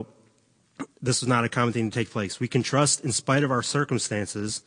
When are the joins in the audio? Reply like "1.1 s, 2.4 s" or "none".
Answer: 0.9 s